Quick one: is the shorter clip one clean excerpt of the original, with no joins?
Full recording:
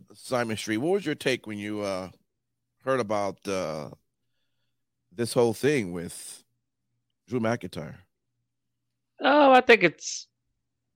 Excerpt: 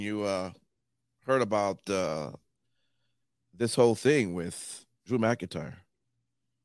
no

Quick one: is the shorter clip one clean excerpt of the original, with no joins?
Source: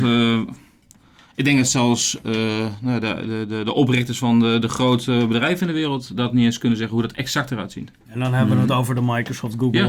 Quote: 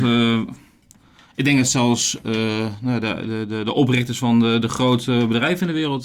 yes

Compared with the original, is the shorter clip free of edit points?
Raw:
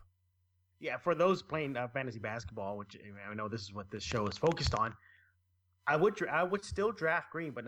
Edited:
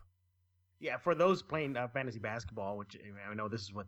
yes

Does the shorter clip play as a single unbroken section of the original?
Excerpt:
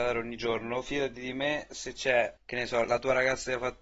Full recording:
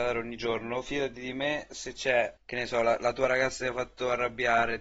no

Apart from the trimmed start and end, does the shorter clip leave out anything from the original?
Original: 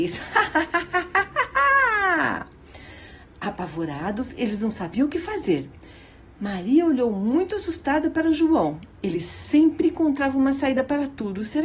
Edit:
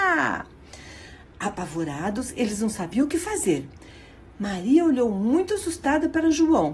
no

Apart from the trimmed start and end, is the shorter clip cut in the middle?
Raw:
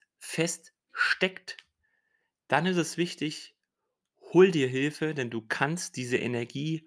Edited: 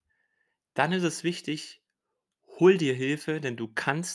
no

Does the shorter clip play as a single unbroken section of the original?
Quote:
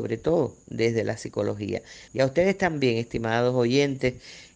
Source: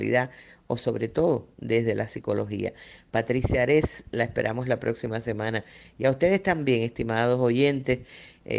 no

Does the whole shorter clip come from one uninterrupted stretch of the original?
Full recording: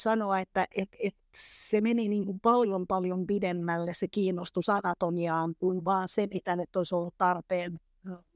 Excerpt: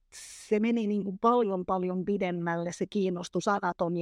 yes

